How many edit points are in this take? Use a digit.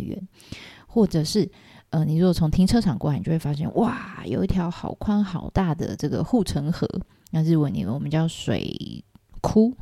0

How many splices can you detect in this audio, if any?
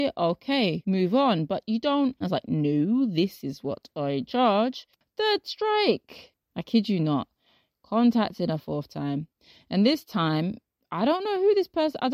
2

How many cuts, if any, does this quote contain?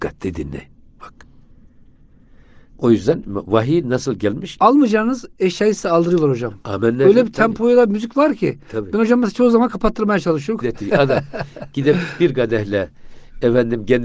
2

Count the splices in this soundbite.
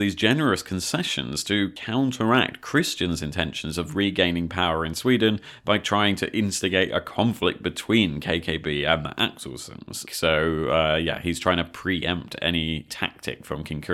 1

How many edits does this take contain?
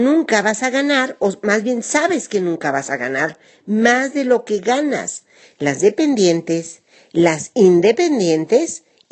1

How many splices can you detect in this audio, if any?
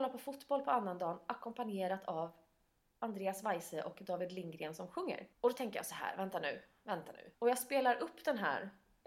2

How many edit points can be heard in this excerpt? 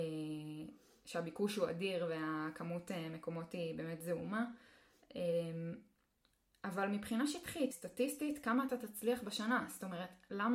1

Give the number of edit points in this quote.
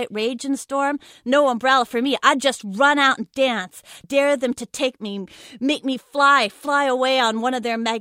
1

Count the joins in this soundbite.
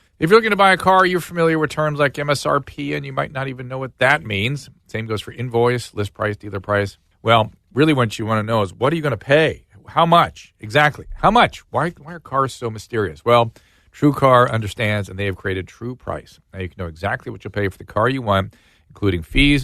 1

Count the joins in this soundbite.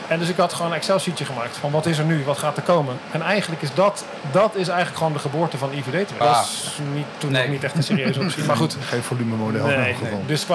1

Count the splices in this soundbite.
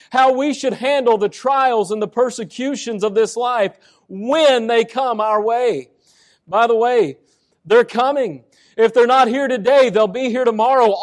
0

